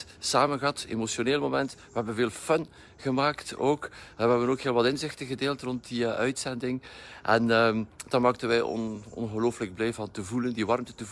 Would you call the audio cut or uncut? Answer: uncut